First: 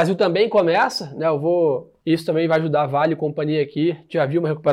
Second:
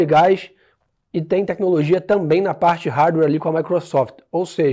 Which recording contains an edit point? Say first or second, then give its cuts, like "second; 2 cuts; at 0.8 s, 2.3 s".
first; 1 cut; at 2.0 s